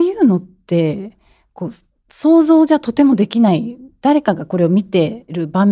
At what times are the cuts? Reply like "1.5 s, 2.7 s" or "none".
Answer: none